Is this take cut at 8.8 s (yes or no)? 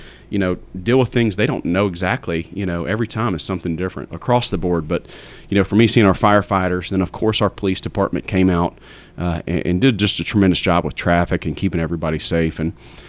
no